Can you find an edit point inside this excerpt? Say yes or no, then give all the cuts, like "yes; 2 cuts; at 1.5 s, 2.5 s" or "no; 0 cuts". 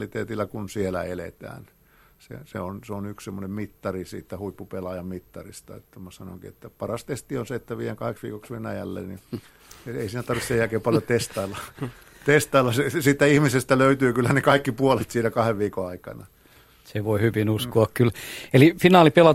no; 0 cuts